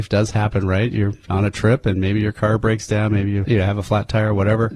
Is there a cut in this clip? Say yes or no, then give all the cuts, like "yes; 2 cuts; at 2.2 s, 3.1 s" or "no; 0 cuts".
no; 0 cuts